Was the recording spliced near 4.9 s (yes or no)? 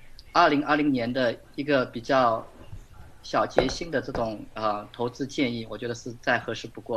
no